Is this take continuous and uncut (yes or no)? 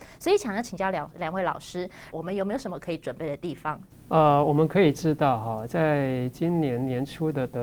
no